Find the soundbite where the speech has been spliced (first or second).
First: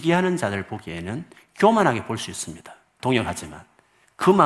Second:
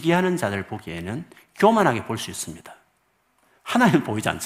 first